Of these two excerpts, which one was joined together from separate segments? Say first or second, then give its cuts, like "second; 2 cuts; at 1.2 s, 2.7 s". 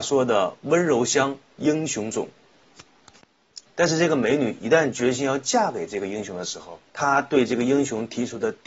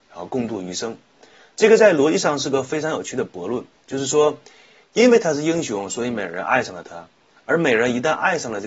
first; 2 cuts; at 3.7 s, 6.9 s